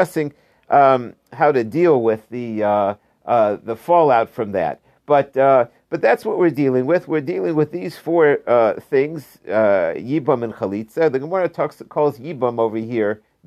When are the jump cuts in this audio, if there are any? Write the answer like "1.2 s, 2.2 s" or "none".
none